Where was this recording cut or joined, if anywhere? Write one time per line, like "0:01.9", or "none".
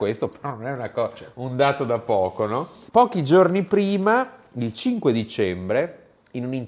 none